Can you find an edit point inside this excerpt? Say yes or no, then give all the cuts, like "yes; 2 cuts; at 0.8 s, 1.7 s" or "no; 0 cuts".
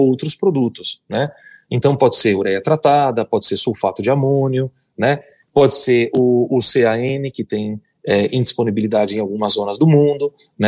no; 0 cuts